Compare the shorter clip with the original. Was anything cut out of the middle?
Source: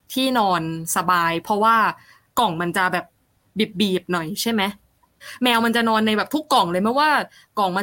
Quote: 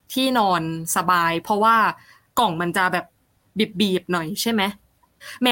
no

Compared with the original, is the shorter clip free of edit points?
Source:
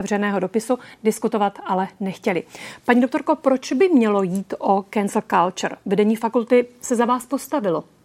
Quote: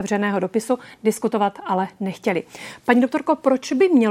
yes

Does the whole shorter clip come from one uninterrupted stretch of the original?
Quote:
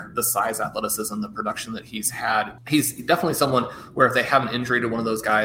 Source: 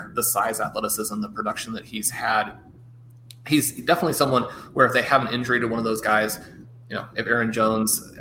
no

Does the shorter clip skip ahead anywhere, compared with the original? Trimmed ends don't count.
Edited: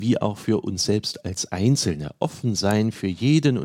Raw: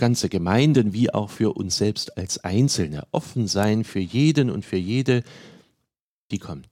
no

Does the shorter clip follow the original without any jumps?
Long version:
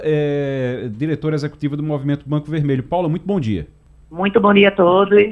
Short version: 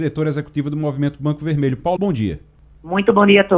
no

